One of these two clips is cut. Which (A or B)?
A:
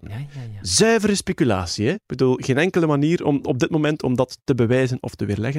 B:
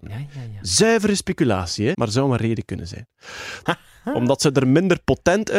B